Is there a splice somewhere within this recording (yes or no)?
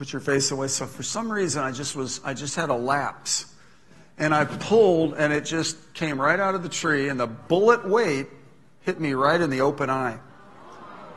no